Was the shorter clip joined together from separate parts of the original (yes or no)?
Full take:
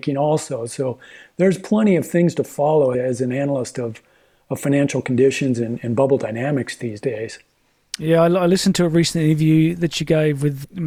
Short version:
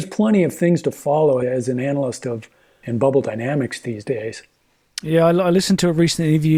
yes